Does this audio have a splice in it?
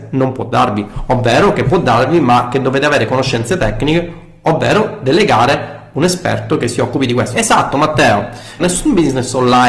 yes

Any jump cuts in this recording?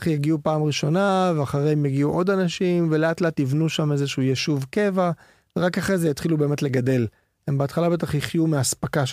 no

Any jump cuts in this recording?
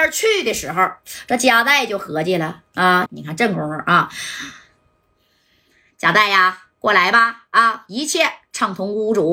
yes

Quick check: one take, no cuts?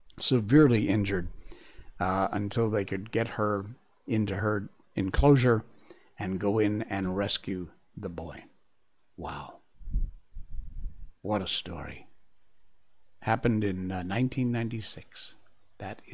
yes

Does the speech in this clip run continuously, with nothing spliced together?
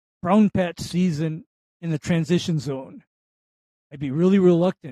yes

